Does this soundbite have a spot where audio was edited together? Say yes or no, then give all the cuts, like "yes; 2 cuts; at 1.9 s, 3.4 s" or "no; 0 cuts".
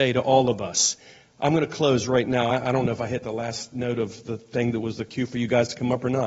no; 0 cuts